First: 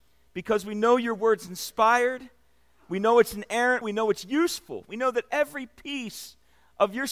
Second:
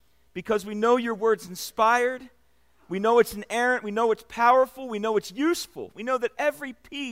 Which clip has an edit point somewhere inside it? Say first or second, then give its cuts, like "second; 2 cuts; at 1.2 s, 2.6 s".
first; 1 cut; at 3.8 s